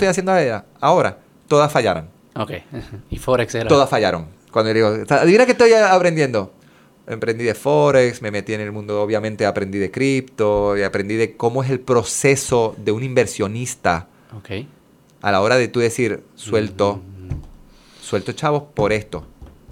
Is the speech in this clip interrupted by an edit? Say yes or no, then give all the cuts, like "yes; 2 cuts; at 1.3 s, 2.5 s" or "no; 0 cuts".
no; 0 cuts